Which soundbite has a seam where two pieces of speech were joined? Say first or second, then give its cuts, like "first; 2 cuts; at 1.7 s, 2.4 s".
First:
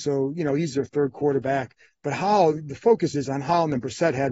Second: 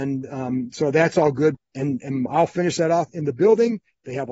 second; 1 cut; at 1.5 s